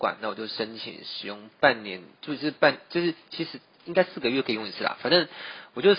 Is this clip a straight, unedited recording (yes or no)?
yes